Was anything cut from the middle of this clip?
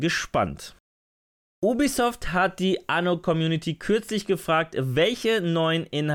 no; 0 cuts

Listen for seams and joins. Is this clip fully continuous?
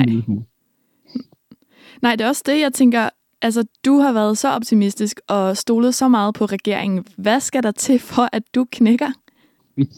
no; 1 cut; at 3.7 s

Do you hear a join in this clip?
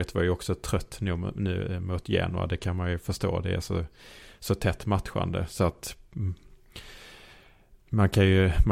no; 0 cuts

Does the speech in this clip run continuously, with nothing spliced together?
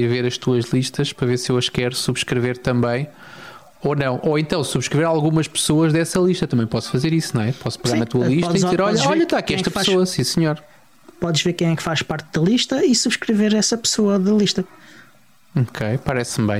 yes; 0 cuts

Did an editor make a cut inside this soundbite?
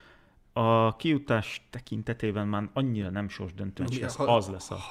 yes; 1 cut; at 3.8 s

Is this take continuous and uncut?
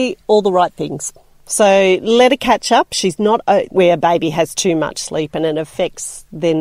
no; 1 cut; at 3.7 s

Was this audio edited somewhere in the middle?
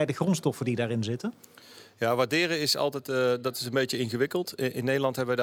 no; 0 cuts

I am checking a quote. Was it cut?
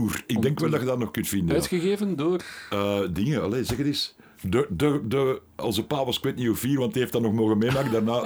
no; 0 cuts

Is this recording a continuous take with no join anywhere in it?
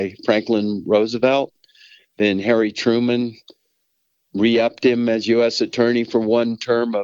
no; 1 cut; at 2.0 s

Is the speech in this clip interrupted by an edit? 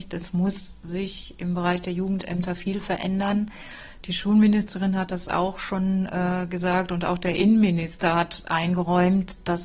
no; 0 cuts

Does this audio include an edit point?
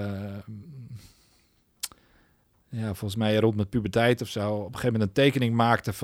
no; 0 cuts

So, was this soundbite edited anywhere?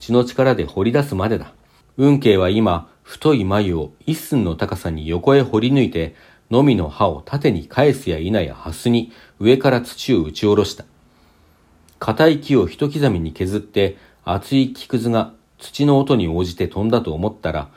yes; 1 cut; at 1.8 s

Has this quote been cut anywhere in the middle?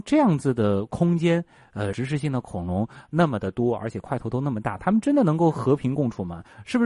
yes; 1 cut; at 1.9 s

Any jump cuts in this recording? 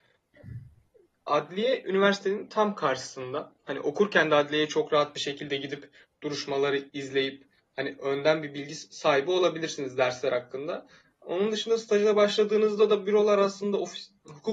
no; 0 cuts

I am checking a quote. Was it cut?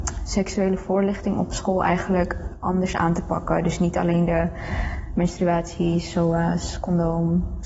no; 0 cuts

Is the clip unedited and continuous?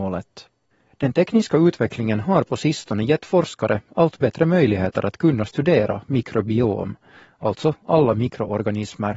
yes; 0 cuts

